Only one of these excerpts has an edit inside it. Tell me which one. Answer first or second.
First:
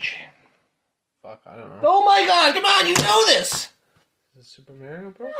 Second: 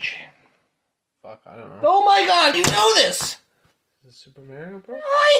second